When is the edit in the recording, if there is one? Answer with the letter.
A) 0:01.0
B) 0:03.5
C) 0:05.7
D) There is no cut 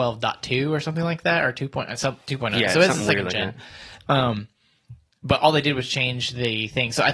D